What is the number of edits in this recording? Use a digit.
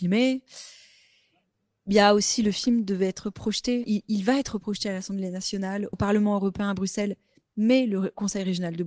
2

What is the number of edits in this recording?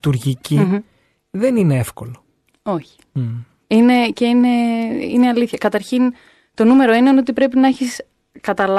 0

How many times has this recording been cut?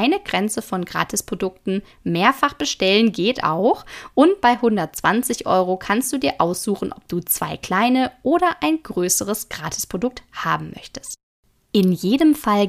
0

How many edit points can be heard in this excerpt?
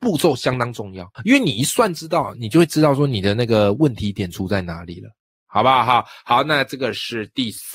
1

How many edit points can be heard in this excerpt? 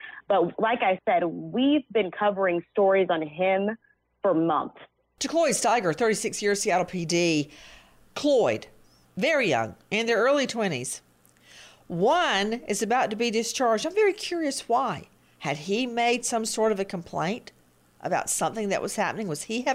1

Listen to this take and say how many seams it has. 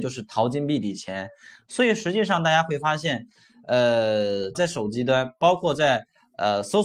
1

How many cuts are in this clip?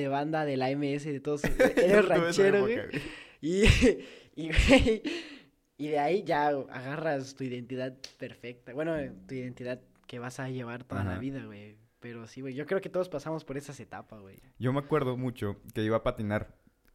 0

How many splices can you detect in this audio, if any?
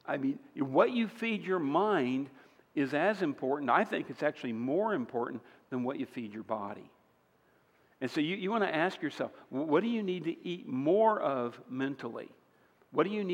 0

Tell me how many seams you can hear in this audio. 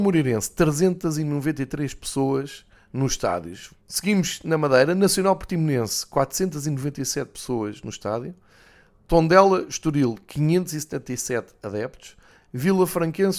1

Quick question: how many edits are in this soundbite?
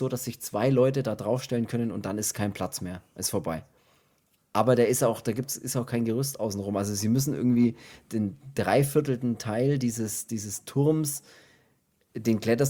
0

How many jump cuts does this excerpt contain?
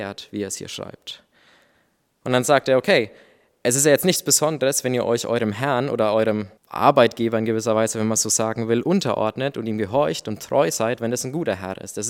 1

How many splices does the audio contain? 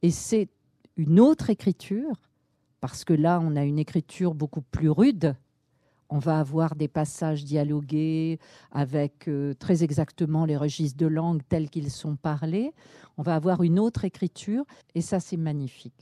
1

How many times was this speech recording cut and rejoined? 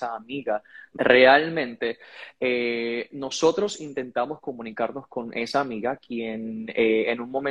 1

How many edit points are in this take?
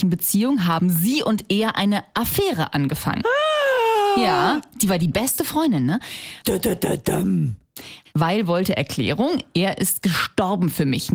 2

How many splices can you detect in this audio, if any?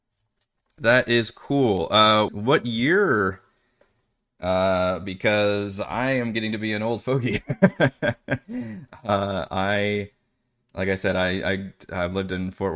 1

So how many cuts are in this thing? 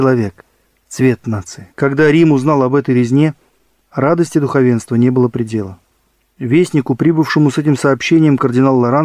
1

